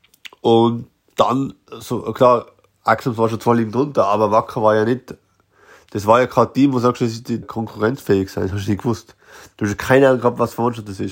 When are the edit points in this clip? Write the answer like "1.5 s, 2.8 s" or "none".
7.4 s